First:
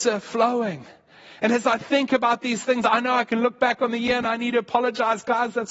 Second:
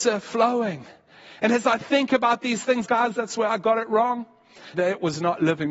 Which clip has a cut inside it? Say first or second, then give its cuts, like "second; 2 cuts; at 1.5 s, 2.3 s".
second; 2 cuts; at 2.8 s, 4.7 s